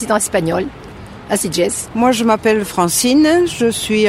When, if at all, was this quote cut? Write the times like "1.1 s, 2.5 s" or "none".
none